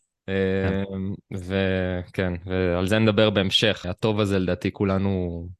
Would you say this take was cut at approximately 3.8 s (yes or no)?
yes